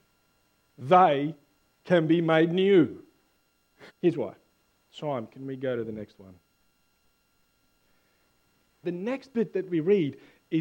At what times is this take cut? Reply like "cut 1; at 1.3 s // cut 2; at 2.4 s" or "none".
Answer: cut 1; at 3.9 s // cut 2; at 8.8 s